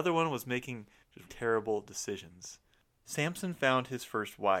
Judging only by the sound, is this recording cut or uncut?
cut